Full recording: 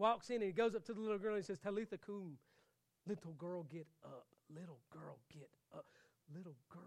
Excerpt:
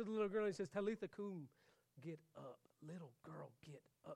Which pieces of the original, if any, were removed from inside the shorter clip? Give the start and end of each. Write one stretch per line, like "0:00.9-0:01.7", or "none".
0:02.9-0:03.6